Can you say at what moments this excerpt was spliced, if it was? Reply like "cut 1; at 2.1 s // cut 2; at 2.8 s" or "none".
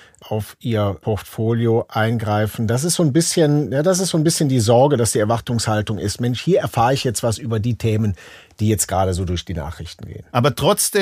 none

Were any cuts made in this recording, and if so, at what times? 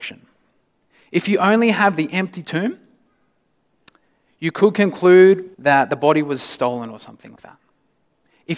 cut 1; at 5.5 s // cut 2; at 7.4 s

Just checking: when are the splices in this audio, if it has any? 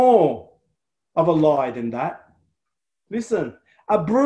cut 1; at 3.1 s

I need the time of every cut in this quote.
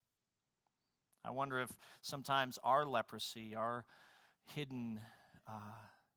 none

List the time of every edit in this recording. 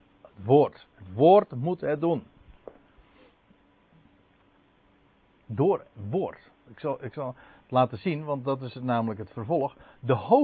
cut 1; at 5.4 s

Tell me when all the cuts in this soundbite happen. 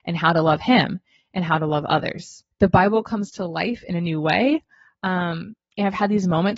cut 1; at 2.5 s

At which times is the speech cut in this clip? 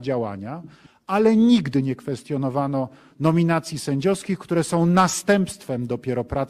none

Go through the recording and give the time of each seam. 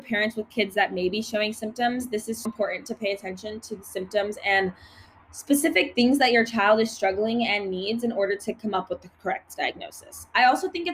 cut 1; at 2.5 s

